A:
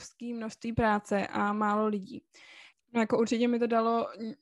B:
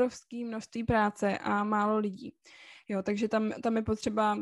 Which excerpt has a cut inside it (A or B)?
A